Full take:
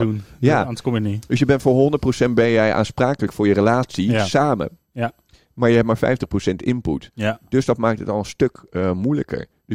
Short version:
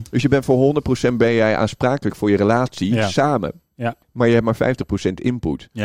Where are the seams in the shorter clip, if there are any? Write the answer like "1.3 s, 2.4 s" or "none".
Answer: 4.0 s